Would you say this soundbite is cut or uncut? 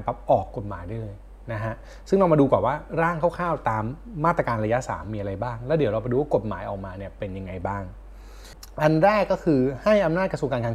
uncut